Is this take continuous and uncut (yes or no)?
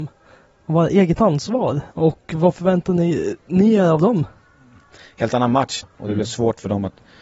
no